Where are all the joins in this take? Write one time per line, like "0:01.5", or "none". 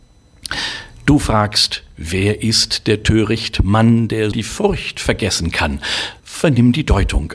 0:04.3
0:06.2